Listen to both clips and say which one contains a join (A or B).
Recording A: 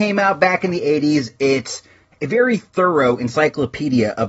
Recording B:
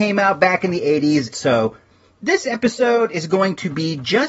B